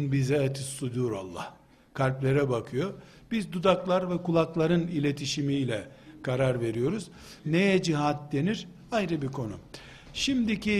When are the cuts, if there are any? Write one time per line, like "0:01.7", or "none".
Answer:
0:07.4